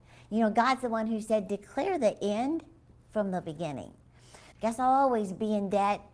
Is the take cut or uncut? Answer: cut